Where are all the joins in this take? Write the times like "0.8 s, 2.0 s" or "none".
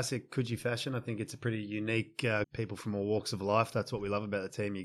2.4 s

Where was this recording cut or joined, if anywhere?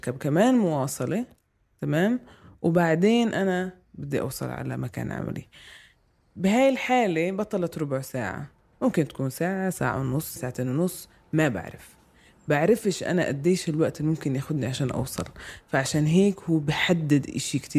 10.4 s

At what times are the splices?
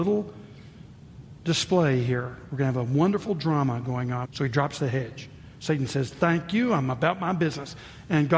4.3 s

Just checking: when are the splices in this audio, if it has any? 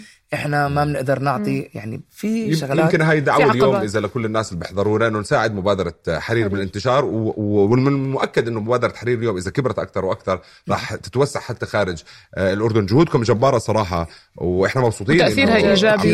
none

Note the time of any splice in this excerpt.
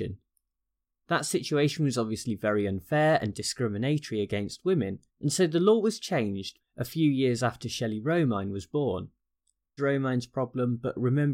5.1 s, 6.6 s, 9.8 s

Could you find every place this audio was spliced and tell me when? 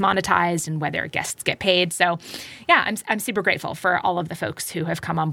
none

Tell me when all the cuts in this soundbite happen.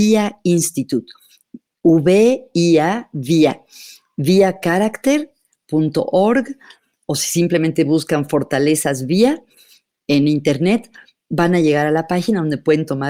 none

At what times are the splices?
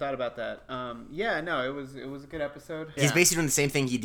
3.0 s

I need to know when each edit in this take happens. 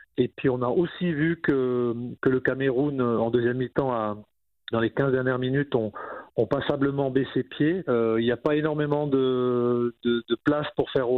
4.7 s, 7.8 s

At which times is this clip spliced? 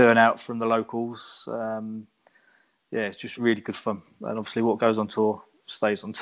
3.4 s

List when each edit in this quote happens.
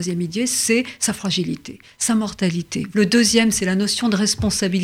2.9 s

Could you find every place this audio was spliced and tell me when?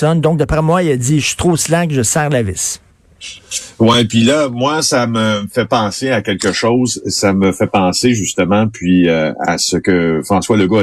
none

